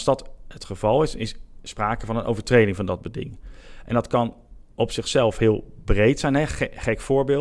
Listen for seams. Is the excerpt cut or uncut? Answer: uncut